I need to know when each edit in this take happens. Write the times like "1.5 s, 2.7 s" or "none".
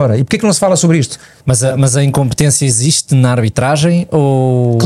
1.4 s